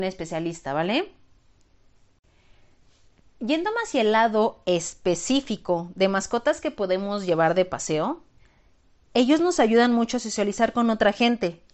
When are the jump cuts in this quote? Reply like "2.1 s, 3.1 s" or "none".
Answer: none